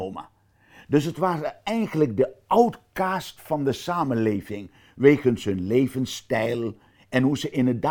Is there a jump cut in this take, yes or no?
no